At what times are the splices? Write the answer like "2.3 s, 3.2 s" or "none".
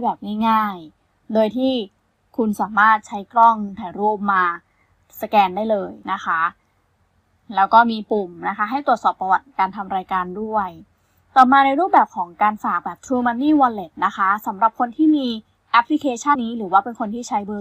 6.0 s, 16.4 s